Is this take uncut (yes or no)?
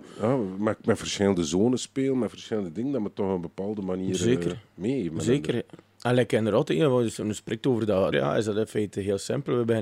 no